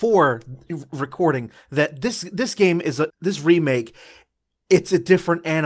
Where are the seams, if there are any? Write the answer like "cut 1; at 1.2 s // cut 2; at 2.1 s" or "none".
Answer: cut 1; at 3.1 s